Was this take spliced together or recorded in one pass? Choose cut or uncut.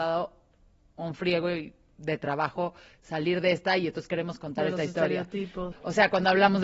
cut